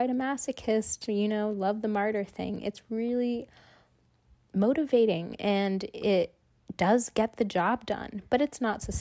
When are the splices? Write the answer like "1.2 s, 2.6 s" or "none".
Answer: none